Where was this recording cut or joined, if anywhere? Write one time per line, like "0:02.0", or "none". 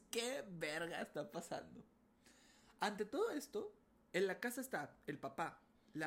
none